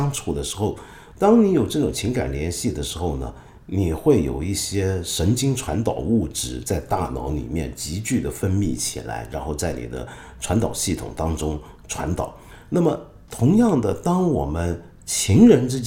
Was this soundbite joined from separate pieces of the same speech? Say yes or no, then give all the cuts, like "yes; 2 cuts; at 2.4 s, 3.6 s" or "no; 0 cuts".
yes; 1 cut; at 1.1 s